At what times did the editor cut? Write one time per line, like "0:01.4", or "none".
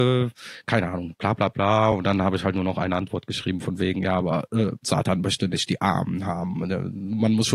none